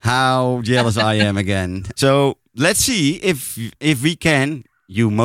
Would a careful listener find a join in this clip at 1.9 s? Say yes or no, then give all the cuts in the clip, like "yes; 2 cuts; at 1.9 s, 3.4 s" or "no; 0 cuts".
yes; 1 cut; at 1.9 s